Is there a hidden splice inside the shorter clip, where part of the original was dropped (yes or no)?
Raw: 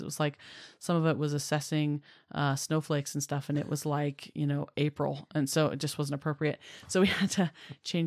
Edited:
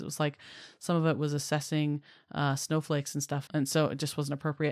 yes